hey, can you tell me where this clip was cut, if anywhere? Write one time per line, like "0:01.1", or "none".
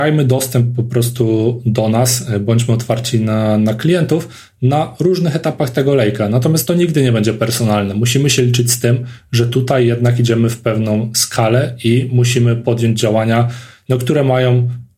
none